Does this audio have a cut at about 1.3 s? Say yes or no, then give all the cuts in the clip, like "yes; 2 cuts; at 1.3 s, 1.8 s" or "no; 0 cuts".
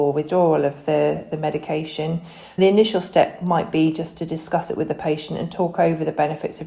no; 1 cut; at 2.6 s